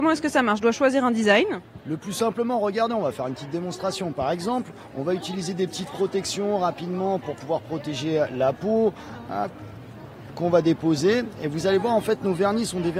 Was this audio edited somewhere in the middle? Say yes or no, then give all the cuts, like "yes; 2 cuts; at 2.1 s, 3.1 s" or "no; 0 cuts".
no; 0 cuts